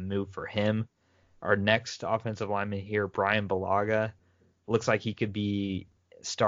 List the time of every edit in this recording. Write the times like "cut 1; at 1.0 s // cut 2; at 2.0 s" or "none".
none